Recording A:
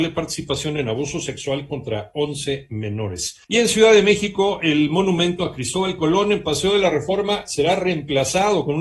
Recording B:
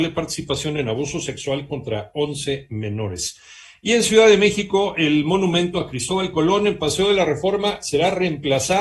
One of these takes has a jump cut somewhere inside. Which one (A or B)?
A